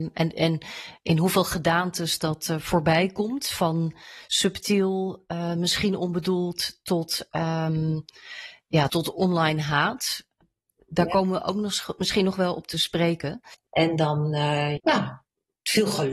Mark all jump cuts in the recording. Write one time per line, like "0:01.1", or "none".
0:08.9
0:13.7
0:14.8